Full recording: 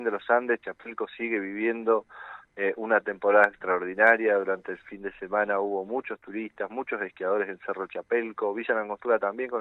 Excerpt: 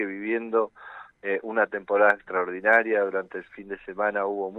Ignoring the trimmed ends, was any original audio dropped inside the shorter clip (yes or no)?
no